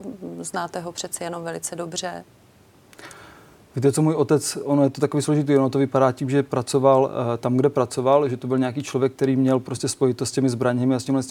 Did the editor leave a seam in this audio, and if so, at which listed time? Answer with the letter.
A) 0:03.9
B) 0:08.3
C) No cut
C